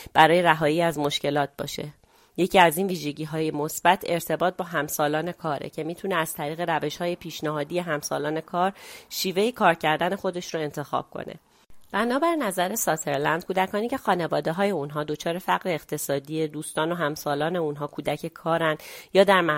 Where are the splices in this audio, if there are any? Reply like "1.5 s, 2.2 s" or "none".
none